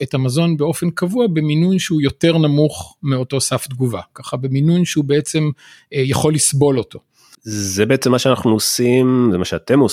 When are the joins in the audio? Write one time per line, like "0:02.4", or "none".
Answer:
0:07.3